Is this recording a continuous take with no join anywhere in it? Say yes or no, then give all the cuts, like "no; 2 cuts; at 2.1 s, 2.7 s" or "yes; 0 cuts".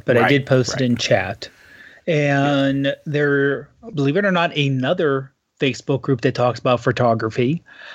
yes; 0 cuts